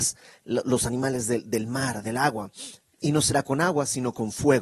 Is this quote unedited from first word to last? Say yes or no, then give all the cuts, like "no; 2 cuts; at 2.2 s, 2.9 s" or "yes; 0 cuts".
yes; 0 cuts